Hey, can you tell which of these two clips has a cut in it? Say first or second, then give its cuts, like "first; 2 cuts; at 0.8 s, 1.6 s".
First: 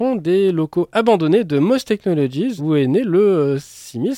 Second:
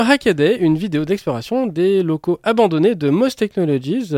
first; 1 cut; at 2.6 s